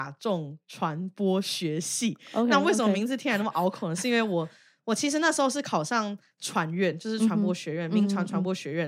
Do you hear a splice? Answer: no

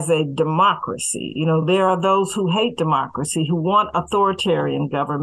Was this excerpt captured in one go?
yes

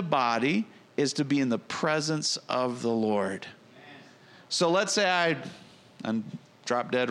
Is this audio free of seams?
yes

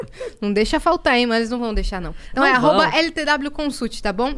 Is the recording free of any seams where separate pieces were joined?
yes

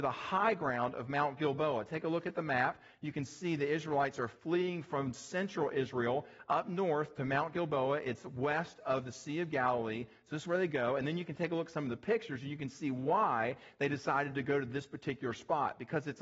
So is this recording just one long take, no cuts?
yes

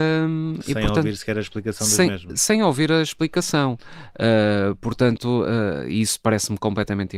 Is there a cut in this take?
no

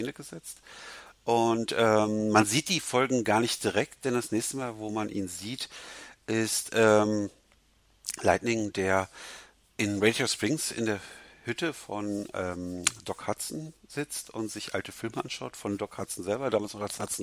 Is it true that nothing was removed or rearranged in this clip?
yes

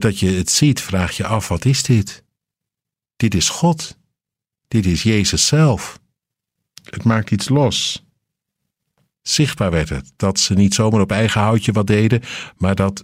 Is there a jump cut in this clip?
yes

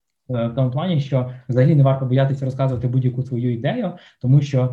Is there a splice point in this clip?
no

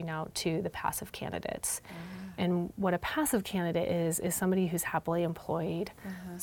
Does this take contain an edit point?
no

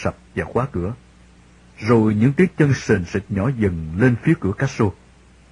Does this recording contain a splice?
no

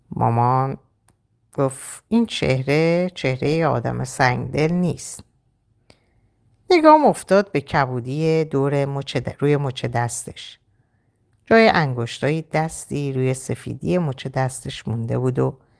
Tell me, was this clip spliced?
no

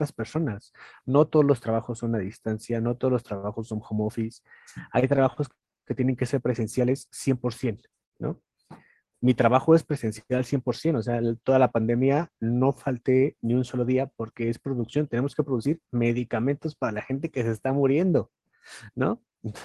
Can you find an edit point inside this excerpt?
no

